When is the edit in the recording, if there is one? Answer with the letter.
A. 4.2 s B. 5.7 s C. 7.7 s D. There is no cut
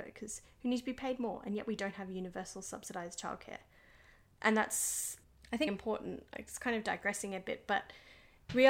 B